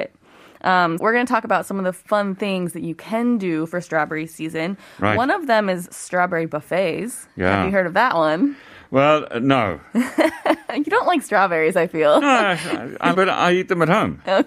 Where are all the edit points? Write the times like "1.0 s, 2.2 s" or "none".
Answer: 1.0 s, 13.1 s

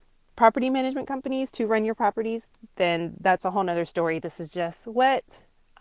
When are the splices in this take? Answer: none

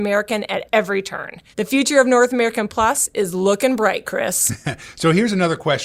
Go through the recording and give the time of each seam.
1.5 s

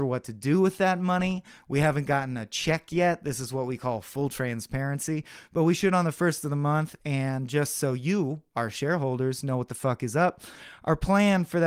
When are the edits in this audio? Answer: none

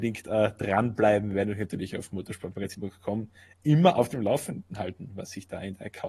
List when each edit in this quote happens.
none

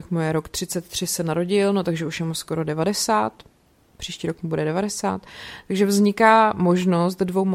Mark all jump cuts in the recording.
none

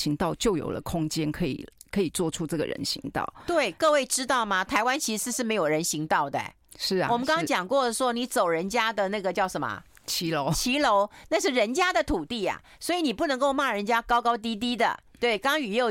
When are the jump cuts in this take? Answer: none

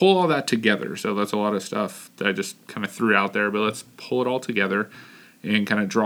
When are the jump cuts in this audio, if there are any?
none

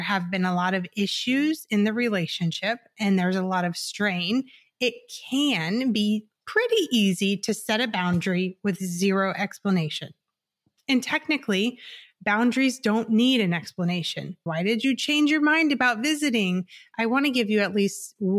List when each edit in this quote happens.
14.5 s

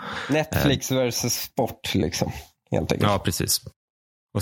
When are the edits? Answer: none

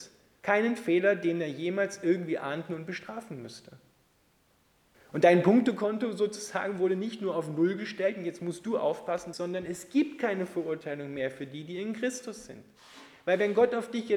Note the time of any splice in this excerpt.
4.9 s, 9.3 s

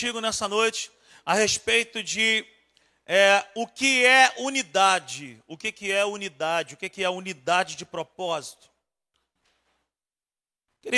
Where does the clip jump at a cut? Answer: none

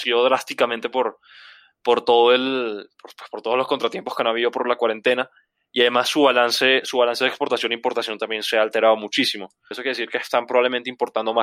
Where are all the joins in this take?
9.7 s

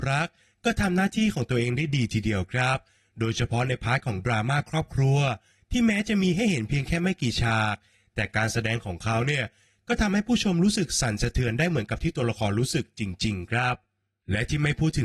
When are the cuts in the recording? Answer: none

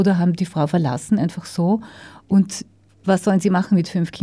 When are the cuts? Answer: none

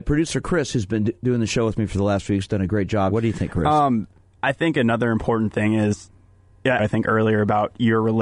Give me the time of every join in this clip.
3.1 s, 6.8 s

